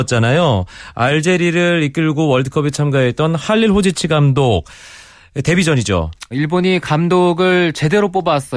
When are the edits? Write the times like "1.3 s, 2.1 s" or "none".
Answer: 6.3 s